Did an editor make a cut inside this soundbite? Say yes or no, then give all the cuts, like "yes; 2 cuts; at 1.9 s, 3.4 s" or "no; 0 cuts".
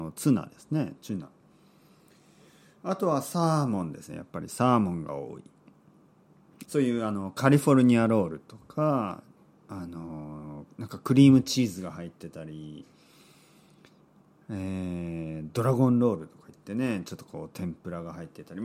yes; 1 cut; at 6.6 s